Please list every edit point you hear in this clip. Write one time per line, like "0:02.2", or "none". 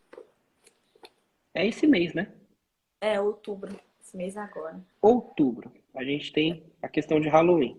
0:04.9